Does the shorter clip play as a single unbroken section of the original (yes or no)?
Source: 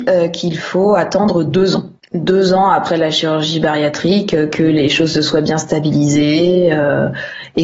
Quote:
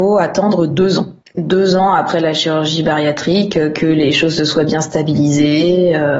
yes